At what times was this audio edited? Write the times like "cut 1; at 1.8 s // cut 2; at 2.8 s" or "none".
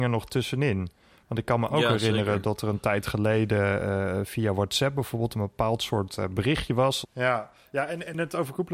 cut 1; at 7.0 s